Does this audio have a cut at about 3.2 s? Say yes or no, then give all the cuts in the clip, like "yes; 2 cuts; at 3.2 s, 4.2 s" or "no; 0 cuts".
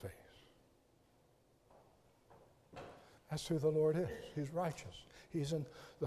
yes; 1 cut; at 3.2 s